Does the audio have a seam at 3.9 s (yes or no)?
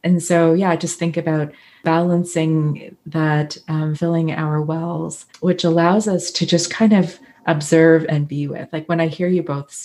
yes